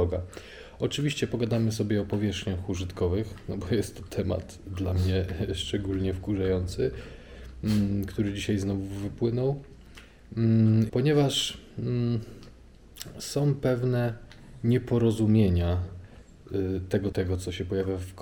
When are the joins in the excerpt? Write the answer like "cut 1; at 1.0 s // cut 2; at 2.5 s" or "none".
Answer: cut 1; at 10.9 s // cut 2; at 17.1 s